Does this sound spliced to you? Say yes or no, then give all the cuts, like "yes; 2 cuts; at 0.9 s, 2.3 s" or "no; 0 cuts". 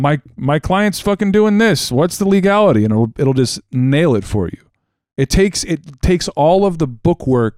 no; 0 cuts